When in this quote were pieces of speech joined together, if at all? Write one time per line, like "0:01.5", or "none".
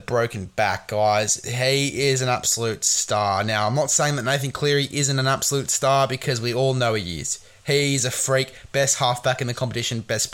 none